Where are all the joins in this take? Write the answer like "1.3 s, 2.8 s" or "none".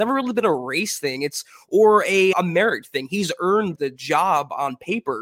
2.3 s, 3.8 s